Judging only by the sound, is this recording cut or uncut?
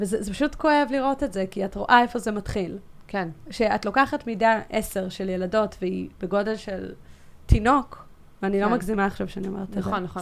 uncut